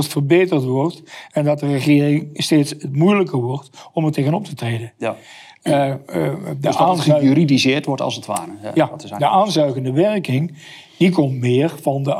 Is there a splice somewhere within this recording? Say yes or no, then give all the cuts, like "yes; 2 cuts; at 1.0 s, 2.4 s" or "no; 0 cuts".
no; 0 cuts